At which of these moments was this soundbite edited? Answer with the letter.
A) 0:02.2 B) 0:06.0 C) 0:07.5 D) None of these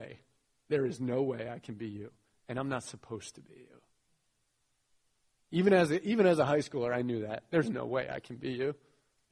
D